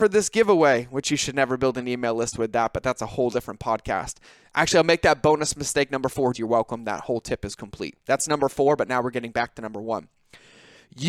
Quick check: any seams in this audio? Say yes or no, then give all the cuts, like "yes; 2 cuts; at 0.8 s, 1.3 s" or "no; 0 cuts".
yes; 1 cut; at 6.3 s